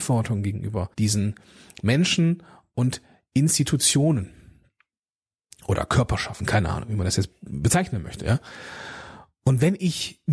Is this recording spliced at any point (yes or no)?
yes